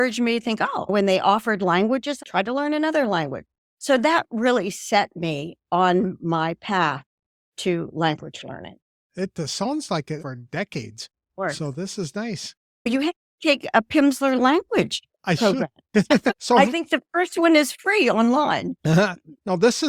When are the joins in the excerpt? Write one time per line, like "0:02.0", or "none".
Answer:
0:02.2
0:10.2